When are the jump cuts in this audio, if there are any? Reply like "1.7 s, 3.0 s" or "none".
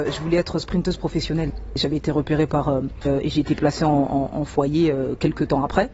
3.1 s